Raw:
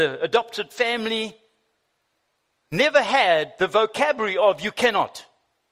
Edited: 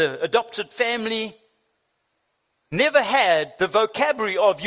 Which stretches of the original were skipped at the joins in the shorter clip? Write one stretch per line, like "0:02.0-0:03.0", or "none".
none